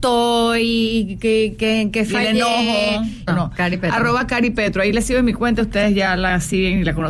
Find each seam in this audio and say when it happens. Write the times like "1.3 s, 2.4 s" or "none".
3.3 s